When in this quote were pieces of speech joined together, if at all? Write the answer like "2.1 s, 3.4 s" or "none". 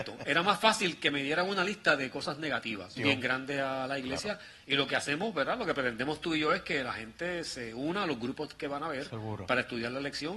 3.0 s